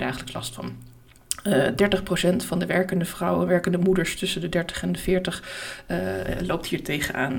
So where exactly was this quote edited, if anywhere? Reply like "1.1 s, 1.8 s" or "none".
none

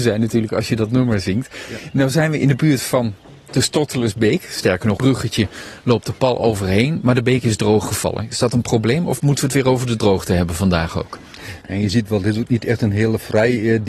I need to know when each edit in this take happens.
5.0 s, 11.6 s

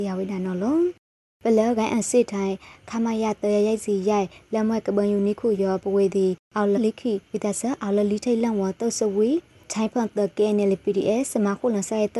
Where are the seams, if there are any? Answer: 6.8 s

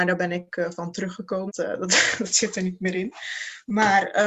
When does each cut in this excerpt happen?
1.5 s

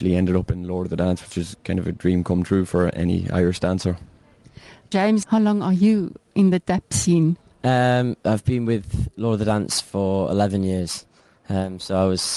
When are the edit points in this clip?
none

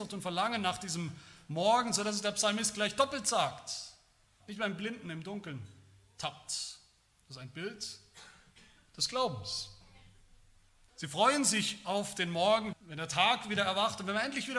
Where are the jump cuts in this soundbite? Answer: 4.4 s, 10.9 s, 12.7 s

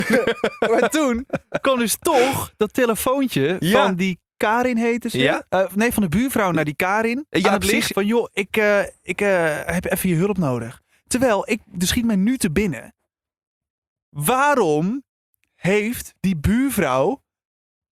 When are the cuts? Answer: 7.9 s

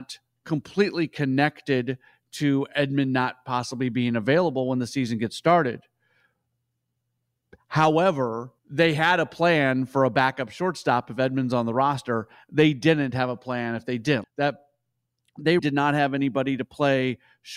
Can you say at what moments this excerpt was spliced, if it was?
8.6 s, 14.2 s, 15.6 s

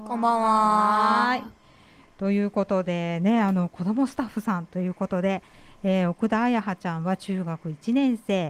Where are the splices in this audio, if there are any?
none

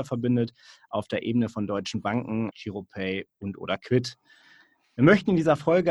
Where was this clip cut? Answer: 2.5 s

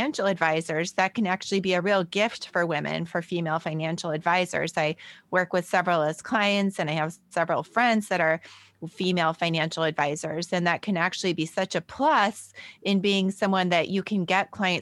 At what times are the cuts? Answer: none

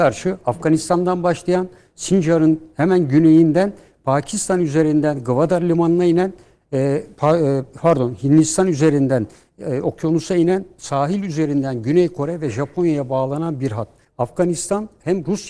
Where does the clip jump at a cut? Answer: 14.0 s

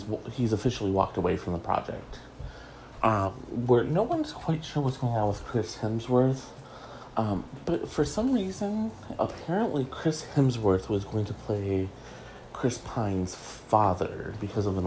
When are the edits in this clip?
7.1 s, 9.2 s

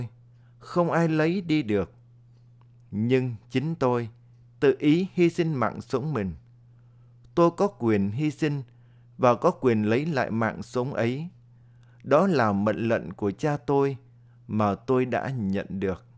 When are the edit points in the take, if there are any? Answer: none

